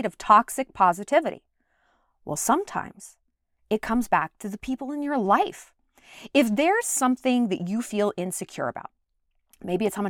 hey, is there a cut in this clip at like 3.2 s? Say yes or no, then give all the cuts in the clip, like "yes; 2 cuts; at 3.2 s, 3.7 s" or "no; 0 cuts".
no; 0 cuts